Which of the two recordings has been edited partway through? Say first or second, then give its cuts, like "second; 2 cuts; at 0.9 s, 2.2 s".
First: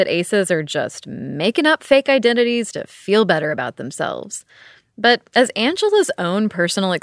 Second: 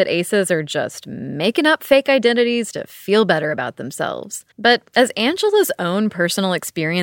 second; 1 cut; at 4.5 s